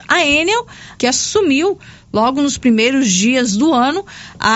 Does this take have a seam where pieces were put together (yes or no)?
yes